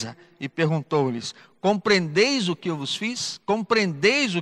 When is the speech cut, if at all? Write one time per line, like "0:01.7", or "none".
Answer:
none